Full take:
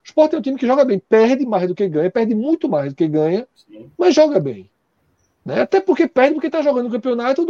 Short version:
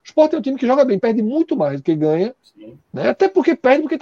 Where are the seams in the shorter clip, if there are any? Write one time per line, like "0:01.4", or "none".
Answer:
0:01.0
0:02.8